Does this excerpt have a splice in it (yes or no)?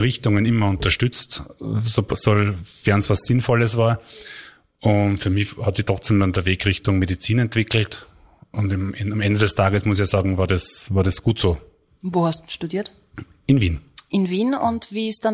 no